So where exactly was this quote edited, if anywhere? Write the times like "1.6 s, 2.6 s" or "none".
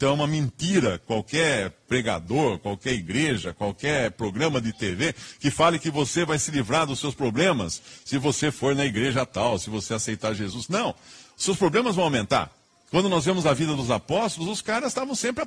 none